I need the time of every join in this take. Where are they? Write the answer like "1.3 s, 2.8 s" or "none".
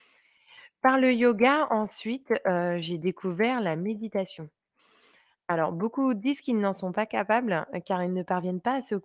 none